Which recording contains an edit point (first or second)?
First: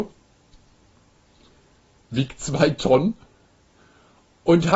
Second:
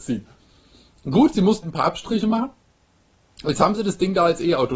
second